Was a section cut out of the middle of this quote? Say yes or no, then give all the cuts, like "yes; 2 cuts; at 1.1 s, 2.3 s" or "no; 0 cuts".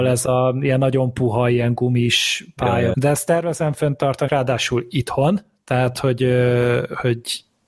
yes; 2 cuts; at 2.9 s, 4.3 s